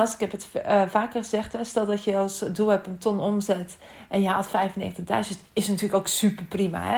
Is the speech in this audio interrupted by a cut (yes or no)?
no